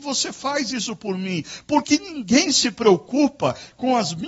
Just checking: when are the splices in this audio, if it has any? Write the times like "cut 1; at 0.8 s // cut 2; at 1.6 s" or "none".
cut 1; at 1.8 s